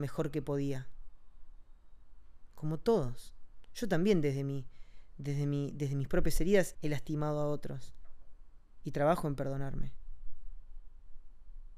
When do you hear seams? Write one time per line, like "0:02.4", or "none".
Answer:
0:06.7
0:08.8

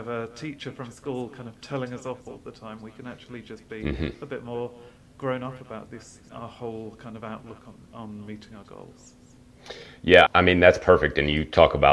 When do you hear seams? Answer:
0:06.3
0:10.3

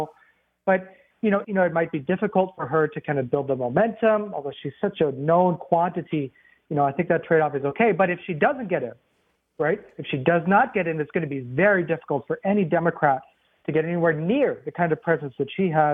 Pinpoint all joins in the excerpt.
0:01.4

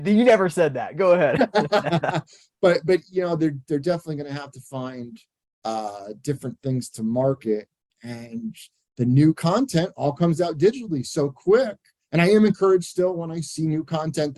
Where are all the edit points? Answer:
none

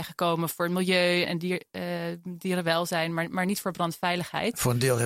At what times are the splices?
0:01.2

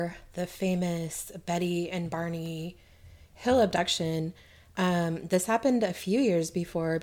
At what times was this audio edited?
none

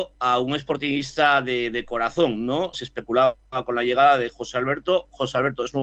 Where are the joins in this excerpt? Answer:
0:02.7

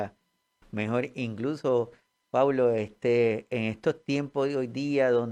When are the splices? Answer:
none

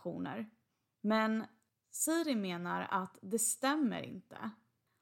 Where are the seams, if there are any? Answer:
0:00.9

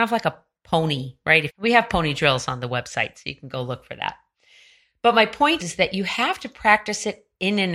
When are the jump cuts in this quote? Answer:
0:01.5
0:05.6

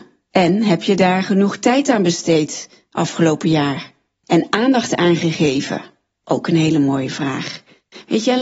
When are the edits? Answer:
none

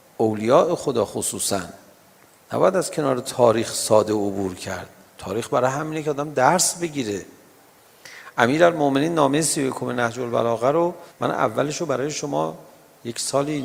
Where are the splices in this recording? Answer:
0:11.1

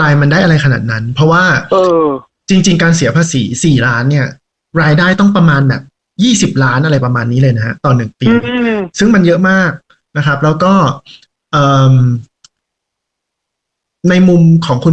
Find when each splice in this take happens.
none

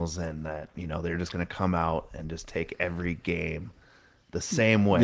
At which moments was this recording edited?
none

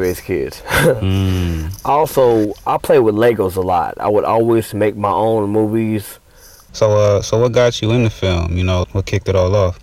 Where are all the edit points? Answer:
0:06.7
0:08.8

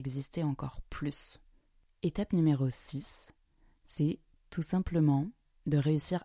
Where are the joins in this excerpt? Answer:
none

